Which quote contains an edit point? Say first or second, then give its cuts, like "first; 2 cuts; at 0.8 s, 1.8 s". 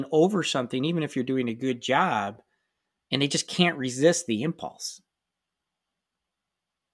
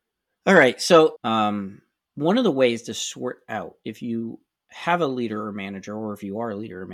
second; 1 cut; at 1.2 s